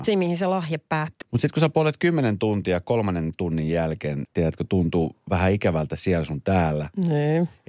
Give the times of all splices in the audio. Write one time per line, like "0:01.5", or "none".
0:01.2
0:04.2